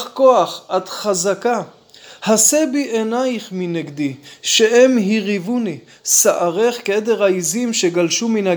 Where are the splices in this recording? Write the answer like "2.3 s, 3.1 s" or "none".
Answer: none